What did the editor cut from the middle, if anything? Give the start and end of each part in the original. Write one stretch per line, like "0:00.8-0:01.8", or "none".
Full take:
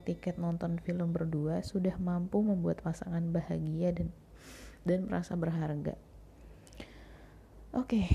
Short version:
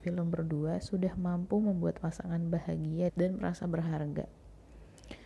0:03.9-0:04.8